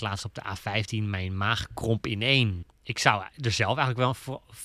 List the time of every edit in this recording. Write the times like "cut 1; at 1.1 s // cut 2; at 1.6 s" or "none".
cut 1; at 2.6 s